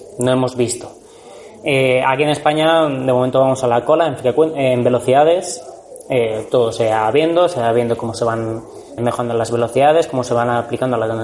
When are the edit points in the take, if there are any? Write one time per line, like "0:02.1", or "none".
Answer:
0:09.0

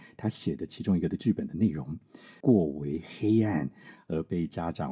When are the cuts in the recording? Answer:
0:02.4

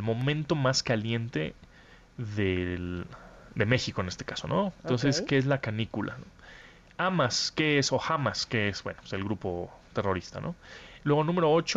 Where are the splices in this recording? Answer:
0:04.8

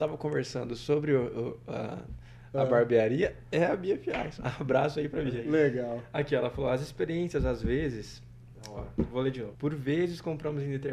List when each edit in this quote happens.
0:09.5

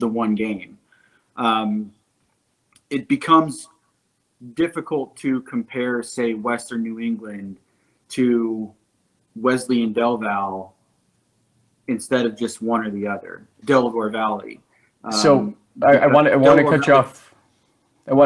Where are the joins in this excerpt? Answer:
0:13.6

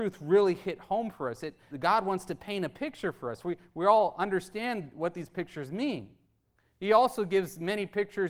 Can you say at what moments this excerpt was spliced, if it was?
0:01.7

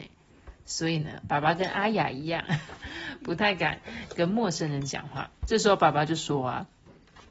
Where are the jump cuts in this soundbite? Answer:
0:05.4

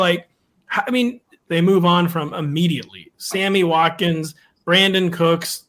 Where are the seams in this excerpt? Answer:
0:01.5

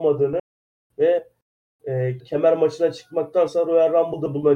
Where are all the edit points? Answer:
0:02.2

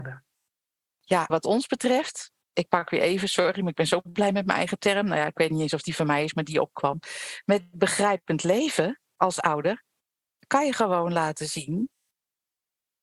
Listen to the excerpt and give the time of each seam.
0:01.3

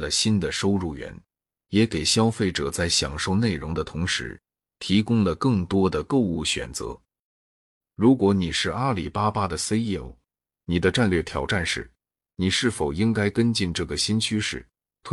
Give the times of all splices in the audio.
none

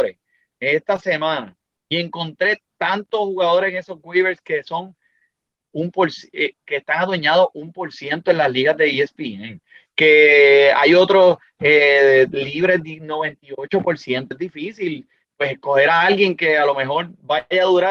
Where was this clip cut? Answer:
0:14.3

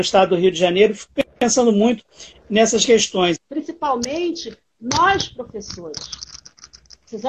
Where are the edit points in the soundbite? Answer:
0:03.4

